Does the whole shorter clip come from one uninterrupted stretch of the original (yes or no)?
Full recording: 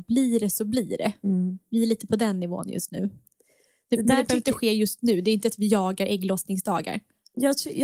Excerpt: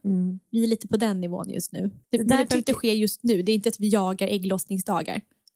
no